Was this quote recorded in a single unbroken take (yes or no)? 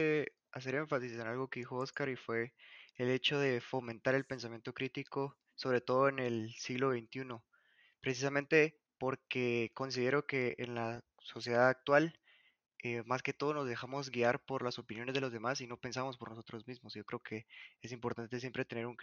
yes